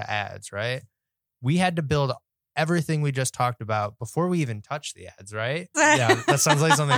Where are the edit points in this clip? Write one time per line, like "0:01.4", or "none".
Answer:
0:05.7